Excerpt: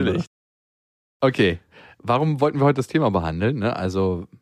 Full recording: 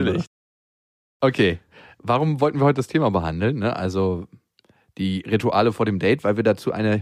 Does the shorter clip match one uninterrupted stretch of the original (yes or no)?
yes